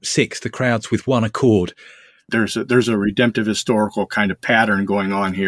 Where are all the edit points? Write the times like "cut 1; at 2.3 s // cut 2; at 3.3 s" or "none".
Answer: cut 1; at 2.3 s